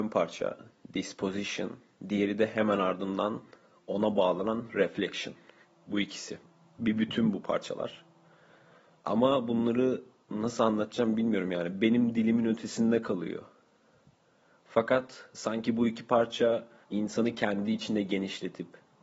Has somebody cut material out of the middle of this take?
yes; 1 cut; at 16.8 s

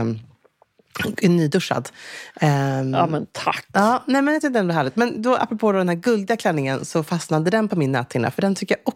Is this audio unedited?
yes; 0 cuts

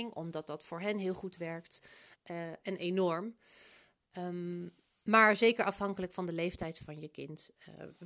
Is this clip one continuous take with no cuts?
no; 1 cut; at 2.1 s

